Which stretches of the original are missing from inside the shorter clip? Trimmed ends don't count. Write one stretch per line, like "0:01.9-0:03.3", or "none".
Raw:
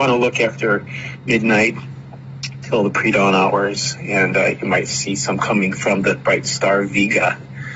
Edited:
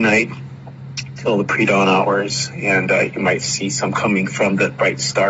none